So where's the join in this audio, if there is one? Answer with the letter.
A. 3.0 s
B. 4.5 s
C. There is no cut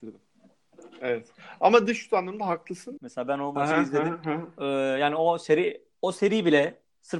A